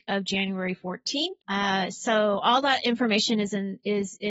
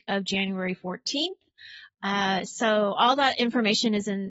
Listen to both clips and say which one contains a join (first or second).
first